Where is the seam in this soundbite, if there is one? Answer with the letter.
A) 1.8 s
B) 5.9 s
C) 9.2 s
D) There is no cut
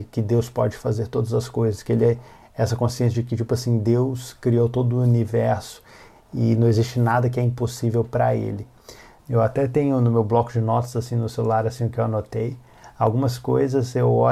C